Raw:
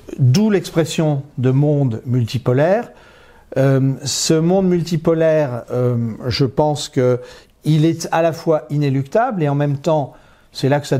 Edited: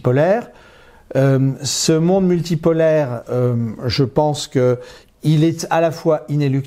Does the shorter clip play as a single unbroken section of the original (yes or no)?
yes